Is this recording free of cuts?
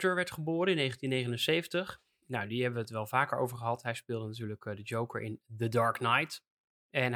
yes; 0 cuts

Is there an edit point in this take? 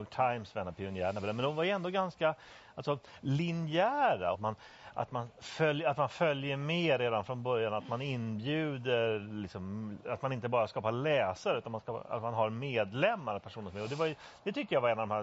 yes; 1 cut; at 4.3 s

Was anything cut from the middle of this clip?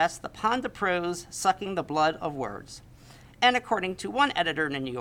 no; 0 cuts

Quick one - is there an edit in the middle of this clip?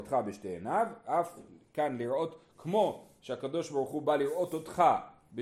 no; 0 cuts

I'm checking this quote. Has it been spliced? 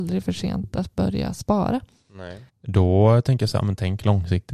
yes; 1 cut; at 2.5 s

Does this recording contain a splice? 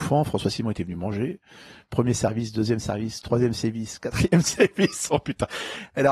no; 0 cuts

